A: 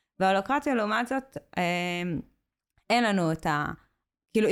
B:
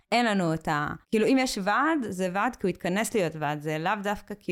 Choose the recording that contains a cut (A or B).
B